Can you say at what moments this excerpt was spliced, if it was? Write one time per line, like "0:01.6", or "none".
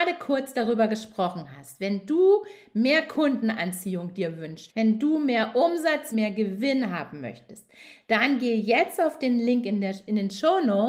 0:04.7
0:06.1